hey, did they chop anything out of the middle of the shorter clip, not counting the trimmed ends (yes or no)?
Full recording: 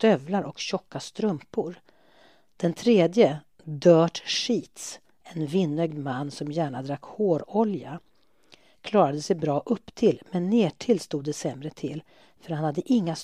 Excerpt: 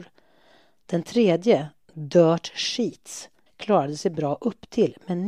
yes